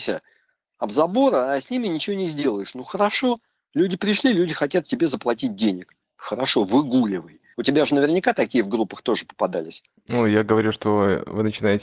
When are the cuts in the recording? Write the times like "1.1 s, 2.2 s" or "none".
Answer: 7.5 s